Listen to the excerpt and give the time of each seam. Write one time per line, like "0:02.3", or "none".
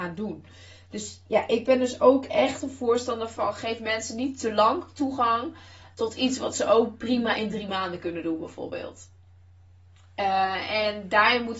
none